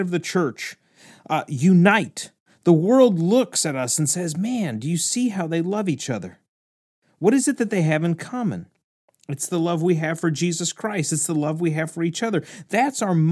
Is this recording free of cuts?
yes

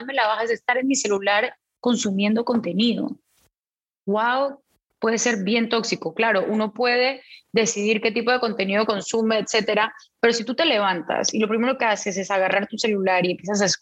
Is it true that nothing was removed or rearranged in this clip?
yes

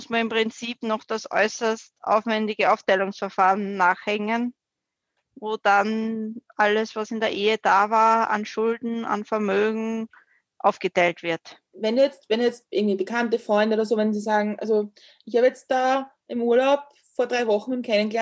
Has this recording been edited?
no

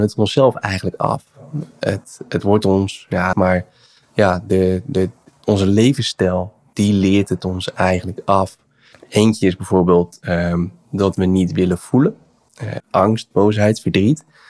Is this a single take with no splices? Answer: no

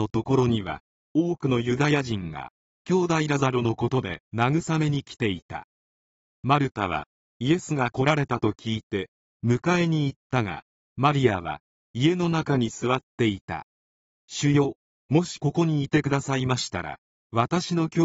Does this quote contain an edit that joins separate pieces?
yes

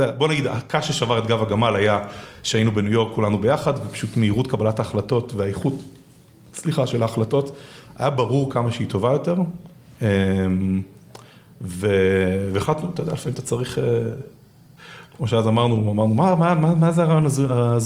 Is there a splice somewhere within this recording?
no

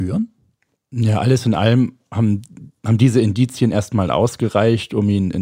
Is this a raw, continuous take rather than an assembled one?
no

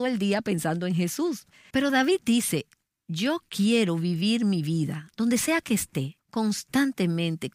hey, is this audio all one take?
no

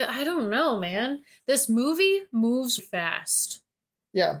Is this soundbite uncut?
no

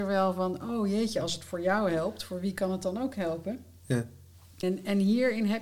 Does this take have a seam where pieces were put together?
yes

